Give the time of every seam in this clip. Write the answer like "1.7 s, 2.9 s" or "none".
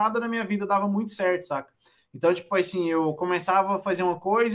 none